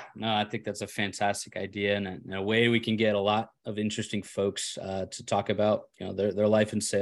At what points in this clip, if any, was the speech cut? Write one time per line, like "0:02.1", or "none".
none